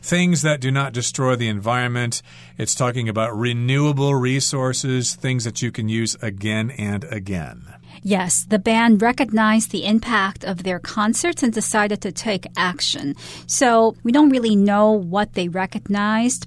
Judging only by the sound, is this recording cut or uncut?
uncut